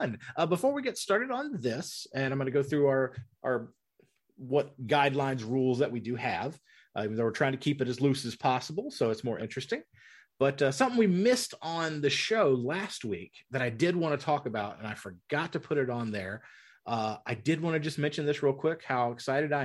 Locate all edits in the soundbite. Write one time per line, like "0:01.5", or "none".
none